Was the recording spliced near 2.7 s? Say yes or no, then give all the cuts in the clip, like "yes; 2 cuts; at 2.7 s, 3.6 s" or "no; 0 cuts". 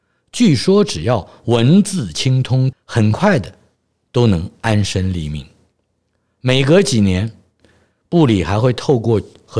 yes; 1 cut; at 2.7 s